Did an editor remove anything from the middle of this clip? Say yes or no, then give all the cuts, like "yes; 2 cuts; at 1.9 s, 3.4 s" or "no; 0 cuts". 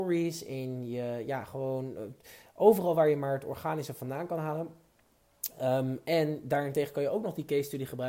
no; 0 cuts